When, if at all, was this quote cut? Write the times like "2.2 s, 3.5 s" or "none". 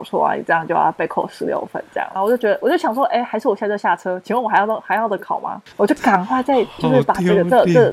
2.2 s, 5.7 s